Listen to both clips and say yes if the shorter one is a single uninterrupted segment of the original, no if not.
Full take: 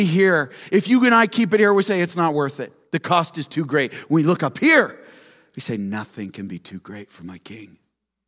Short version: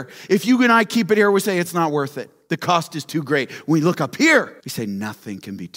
no